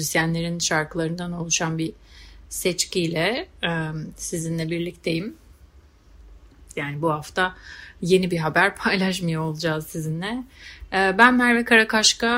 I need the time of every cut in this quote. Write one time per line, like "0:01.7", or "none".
0:06.7